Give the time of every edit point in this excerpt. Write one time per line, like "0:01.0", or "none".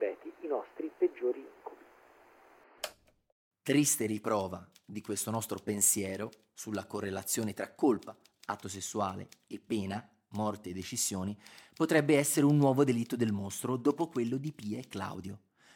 none